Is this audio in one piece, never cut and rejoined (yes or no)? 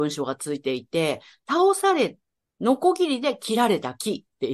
yes